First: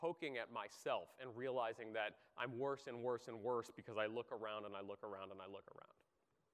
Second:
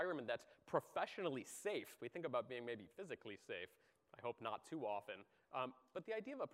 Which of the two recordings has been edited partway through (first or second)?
second